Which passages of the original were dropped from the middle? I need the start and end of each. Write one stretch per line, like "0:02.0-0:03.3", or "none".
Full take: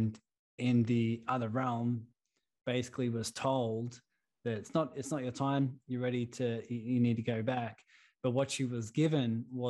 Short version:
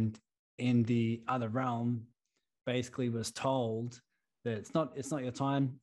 none